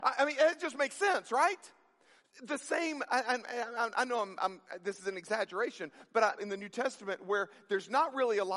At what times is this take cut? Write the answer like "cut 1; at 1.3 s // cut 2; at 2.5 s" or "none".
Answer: cut 1; at 6.4 s